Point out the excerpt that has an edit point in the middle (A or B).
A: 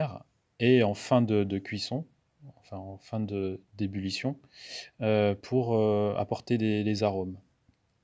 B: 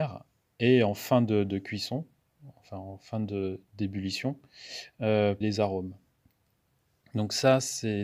B